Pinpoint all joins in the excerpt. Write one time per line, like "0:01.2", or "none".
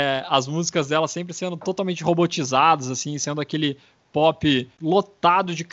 0:04.7